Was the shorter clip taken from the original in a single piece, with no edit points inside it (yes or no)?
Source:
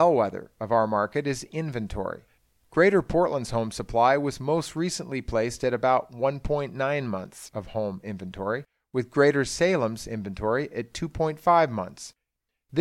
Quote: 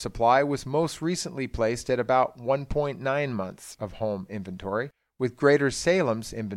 yes